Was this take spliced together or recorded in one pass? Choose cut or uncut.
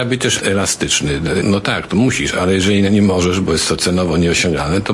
cut